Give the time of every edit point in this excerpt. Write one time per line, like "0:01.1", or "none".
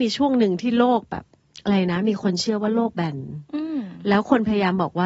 none

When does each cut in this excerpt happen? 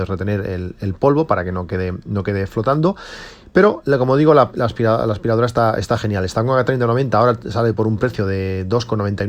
none

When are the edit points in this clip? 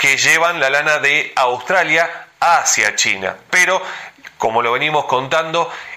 0:03.5

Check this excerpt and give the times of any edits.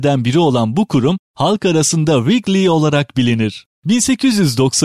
none

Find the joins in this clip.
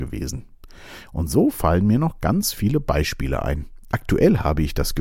0:03.9

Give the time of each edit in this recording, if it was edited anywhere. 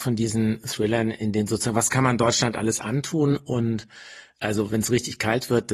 0:04.4

